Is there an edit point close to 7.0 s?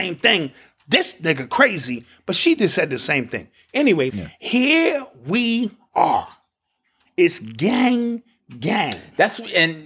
yes; 2 cuts; at 4.1 s, 7.0 s

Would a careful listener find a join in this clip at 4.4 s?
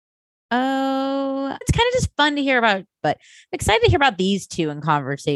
no; 2 cuts; at 1.6 s, 3.0 s

